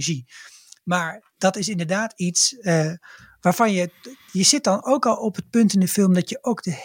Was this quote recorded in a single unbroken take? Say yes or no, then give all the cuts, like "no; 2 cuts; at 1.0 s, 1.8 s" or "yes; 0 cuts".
yes; 0 cuts